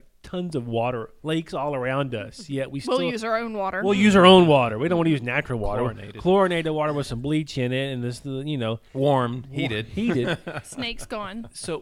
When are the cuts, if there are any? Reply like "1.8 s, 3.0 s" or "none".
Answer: none